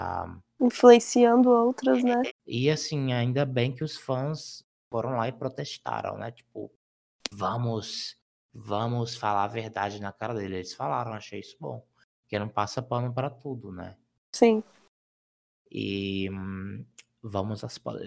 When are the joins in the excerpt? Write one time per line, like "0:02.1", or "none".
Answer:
0:02.3